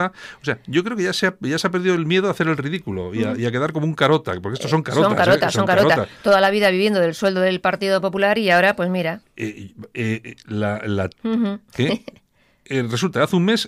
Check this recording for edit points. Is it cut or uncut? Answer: cut